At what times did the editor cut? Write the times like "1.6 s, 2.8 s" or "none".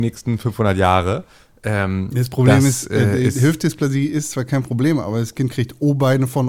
none